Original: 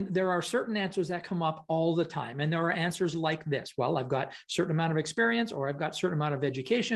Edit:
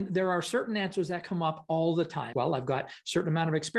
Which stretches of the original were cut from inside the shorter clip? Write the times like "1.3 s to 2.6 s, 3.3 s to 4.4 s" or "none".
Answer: 2.3 s to 3.8 s